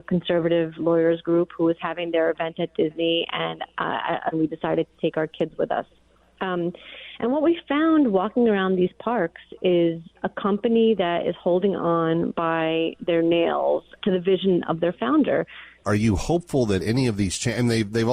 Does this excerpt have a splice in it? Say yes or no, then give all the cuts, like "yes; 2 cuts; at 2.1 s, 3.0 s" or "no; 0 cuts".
yes; 3 cuts; at 4.3 s, 14.0 s, 15.8 s